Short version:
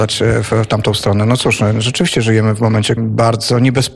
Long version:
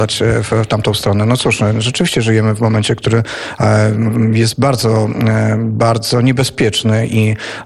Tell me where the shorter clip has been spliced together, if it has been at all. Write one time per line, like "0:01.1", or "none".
0:03.0